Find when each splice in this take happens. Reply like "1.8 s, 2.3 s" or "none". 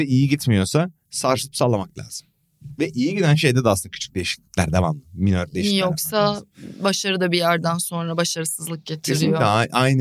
none

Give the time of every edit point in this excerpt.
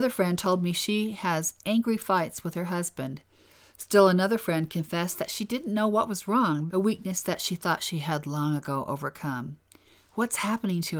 6.7 s

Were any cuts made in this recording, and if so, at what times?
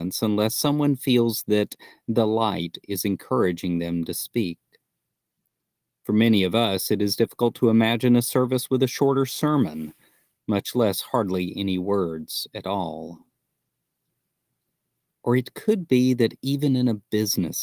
none

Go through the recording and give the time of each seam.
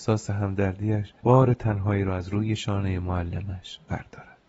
1.2 s

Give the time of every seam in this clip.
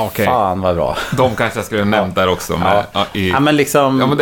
none

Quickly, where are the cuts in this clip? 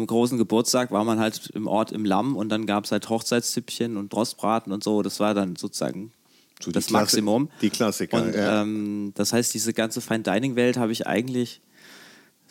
none

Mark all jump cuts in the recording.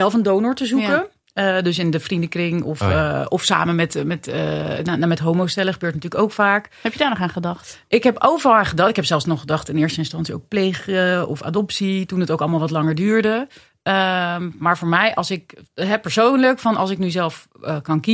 none

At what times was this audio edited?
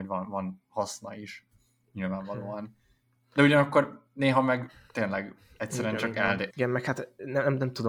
6.5 s

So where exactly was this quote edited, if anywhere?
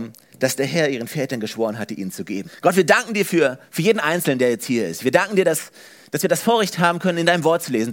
2.5 s

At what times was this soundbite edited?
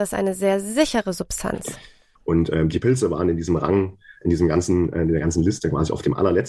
2.2 s

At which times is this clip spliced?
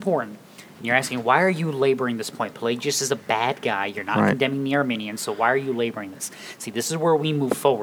2.5 s

